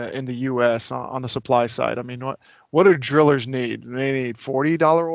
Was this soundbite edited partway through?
no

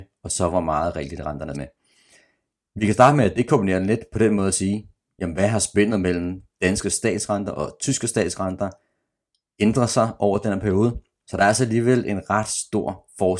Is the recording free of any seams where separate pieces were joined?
no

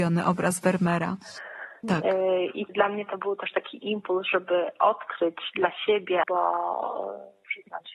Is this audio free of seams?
no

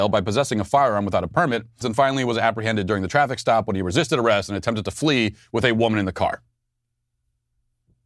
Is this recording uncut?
no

